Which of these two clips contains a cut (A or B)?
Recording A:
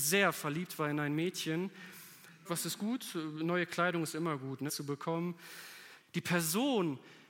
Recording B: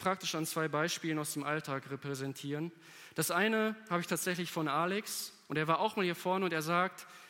A